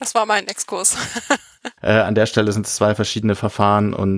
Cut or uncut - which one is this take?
cut